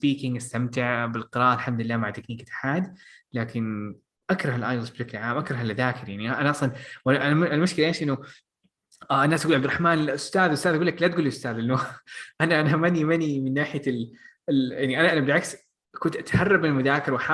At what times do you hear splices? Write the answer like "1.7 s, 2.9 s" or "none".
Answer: 15.1 s